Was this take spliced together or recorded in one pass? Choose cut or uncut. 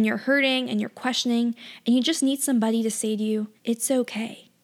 cut